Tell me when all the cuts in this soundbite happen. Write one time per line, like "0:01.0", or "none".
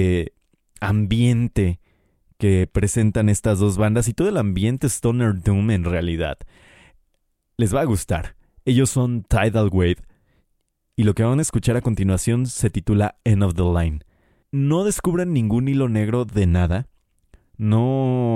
0:14.4

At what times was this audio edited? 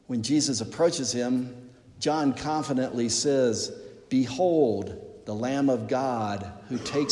none

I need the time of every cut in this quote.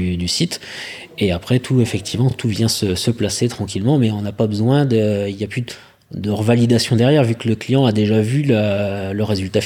none

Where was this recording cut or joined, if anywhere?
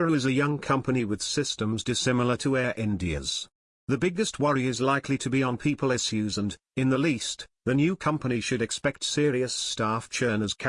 none

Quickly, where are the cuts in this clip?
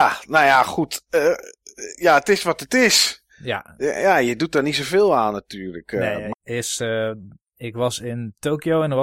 0:06.3

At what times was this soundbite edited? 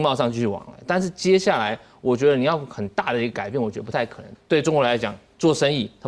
0:04.3

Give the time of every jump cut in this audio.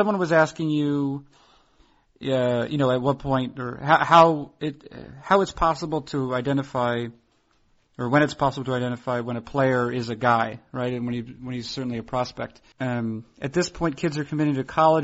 0:12.7

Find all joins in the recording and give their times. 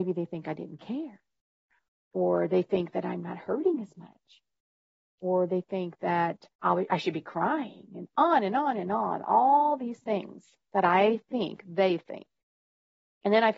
0:06.5

